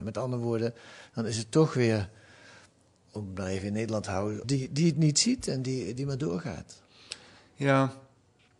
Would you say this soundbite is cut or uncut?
cut